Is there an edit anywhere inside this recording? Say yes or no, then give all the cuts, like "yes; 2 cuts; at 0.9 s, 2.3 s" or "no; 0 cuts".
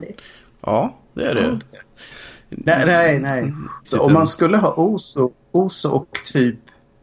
yes; 2 cuts; at 2.1 s, 3.8 s